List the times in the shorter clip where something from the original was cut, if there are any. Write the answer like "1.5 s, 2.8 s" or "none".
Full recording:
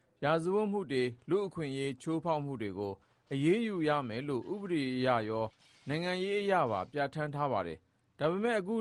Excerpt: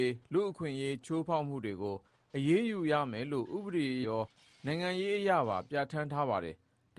4.0 s